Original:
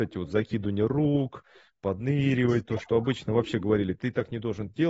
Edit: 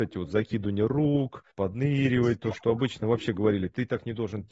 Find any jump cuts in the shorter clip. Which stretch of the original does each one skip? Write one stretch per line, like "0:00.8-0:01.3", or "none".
0:01.5-0:01.8

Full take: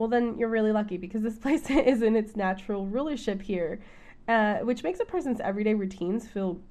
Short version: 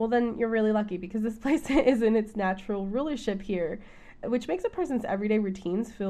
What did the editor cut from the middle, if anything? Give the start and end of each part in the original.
0:04.2-0:04.6

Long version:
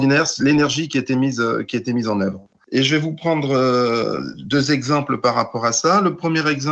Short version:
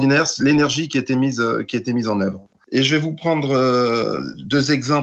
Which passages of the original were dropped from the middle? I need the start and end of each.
none

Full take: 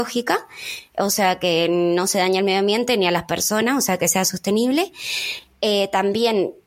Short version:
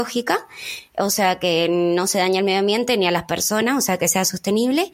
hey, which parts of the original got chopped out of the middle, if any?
none

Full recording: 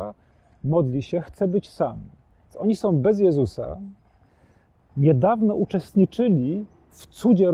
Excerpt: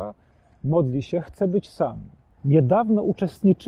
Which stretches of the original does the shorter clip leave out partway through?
0:02.4-0:04.9

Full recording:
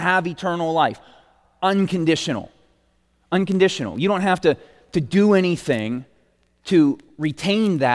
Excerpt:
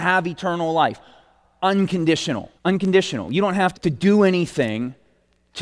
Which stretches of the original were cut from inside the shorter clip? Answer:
0:02.6-0:03.2
0:04.4-0:04.8

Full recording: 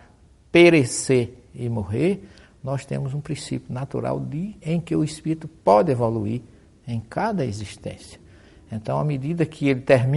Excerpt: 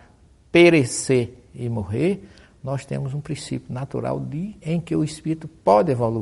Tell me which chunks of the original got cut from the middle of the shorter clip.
none

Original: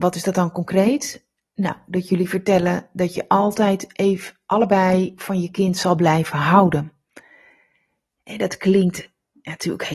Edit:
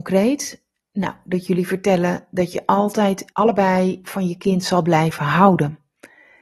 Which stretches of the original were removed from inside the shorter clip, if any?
0:03.9-0:04.5

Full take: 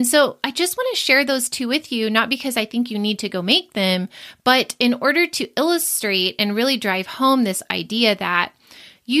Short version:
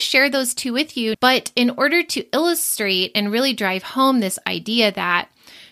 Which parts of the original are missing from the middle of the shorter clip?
0:02.1-0:04.4

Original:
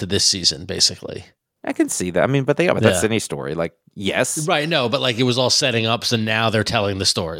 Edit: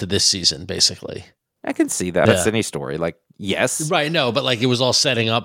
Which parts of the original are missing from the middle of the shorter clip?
0:02.3-0:02.8

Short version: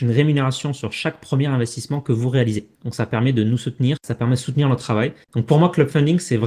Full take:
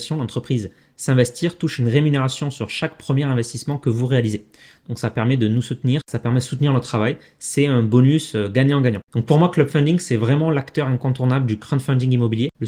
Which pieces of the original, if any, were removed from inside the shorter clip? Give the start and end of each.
0:04.5-0:04.8
0:07.3-0:09.0

